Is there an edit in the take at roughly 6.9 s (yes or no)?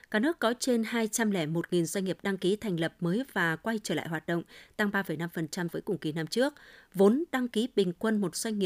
no